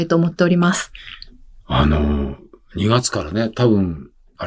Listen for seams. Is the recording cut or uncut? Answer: uncut